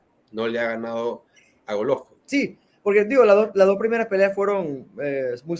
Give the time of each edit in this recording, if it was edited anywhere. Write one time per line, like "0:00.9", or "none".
0:02.2